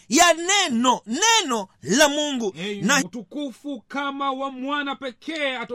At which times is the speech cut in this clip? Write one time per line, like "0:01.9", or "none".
0:03.0